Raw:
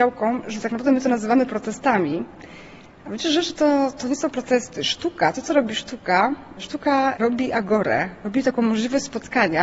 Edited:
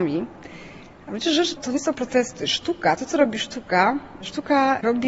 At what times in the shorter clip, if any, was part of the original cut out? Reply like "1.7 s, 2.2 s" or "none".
1.6 s